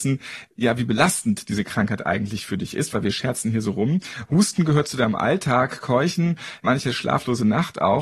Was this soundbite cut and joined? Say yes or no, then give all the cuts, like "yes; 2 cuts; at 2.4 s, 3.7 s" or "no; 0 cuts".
no; 0 cuts